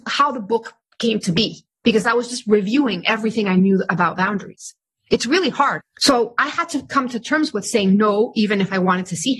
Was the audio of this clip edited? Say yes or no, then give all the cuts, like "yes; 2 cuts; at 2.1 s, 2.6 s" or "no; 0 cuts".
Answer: yes; 1 cut; at 5.8 s